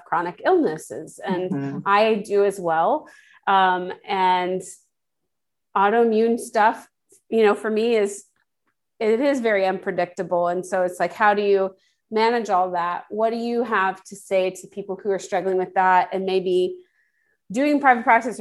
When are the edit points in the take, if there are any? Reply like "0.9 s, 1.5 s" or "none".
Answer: none